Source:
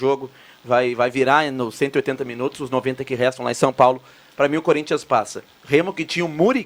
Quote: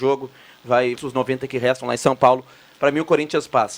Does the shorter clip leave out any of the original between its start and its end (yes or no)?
yes